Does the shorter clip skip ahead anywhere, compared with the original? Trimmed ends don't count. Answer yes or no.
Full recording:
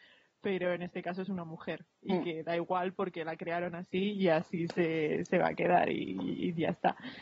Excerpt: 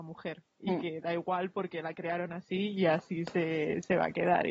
no